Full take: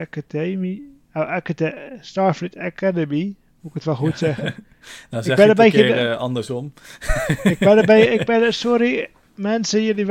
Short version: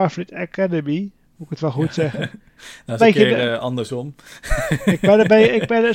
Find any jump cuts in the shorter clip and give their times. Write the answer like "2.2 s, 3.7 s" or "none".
3.0 s

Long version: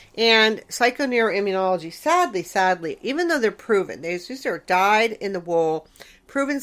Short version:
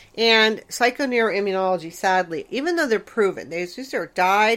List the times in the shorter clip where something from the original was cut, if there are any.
1.9 s

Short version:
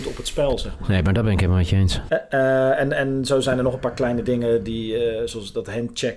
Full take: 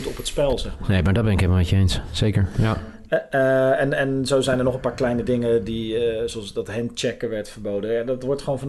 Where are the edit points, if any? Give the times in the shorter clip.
2.1 s

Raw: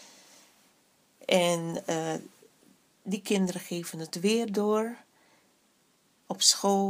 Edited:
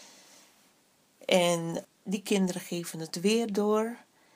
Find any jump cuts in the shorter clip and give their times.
1.8 s

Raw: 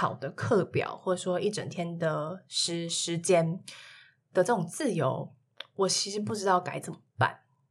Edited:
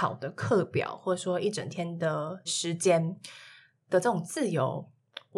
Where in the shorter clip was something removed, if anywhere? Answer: 2.5 s

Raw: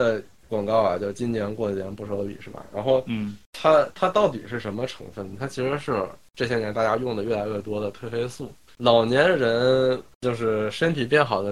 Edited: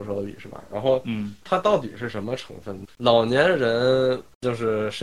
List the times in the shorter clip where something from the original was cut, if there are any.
1.4 s, 2.9 s

